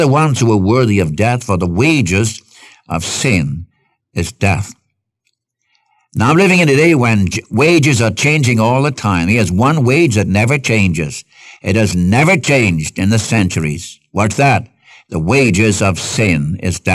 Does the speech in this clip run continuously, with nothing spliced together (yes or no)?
yes